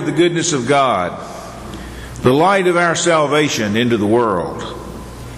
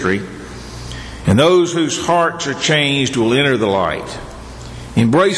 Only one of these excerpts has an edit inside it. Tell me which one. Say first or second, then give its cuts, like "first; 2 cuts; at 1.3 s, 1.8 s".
second; 1 cut; at 1.2 s